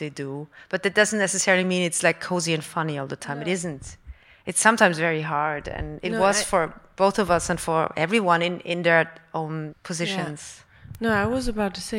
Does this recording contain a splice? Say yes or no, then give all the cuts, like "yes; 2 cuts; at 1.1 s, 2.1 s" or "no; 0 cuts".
yes; 1 cut; at 9.7 s